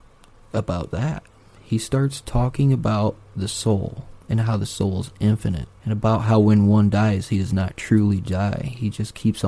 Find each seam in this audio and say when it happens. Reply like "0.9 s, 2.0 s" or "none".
0.9 s, 5.8 s